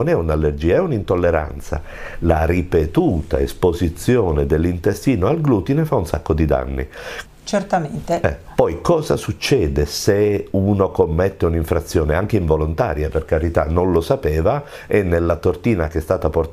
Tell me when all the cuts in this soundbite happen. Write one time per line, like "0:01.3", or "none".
0:07.2
0:08.4